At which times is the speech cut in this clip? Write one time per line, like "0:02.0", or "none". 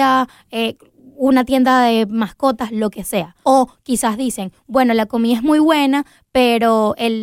0:03.4